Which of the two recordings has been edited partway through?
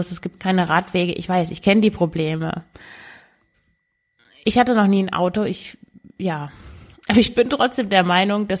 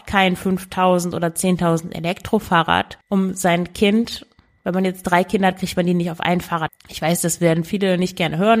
second; 2 cuts; at 3.0 s, 6.7 s

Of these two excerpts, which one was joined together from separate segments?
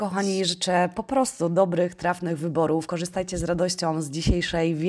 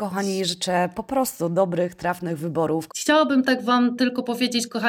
second; 1 cut; at 2.9 s

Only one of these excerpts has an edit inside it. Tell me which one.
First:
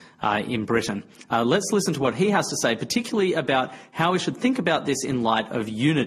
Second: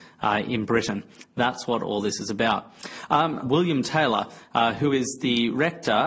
second; 2 cuts; at 1.2 s, 3.4 s

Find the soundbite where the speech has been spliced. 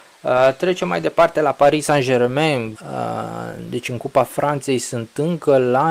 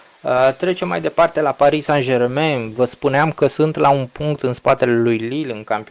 first; 1 cut; at 2.7 s

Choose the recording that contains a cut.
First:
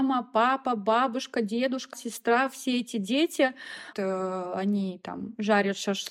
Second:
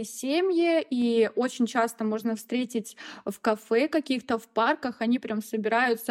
first; 2 cuts; at 1.9 s, 3.9 s

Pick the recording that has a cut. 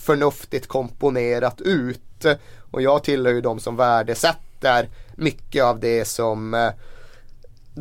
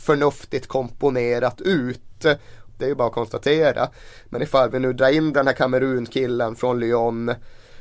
second; 1 cut; at 2.7 s

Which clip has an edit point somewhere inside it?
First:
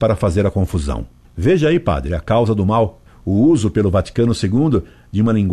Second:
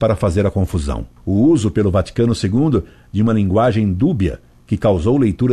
second; 1 cut; at 1.2 s

